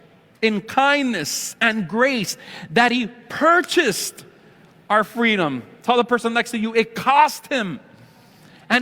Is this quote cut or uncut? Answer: uncut